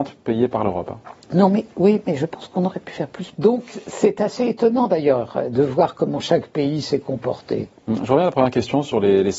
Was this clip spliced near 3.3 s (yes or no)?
yes